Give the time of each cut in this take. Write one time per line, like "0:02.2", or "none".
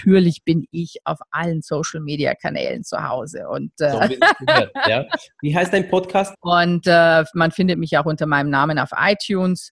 0:06.3